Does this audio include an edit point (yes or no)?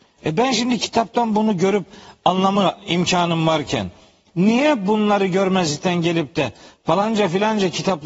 no